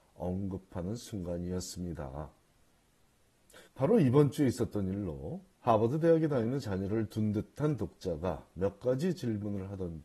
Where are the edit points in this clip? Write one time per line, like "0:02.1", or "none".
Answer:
0:03.7
0:05.5